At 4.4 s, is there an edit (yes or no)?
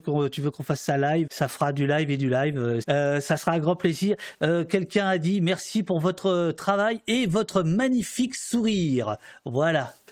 no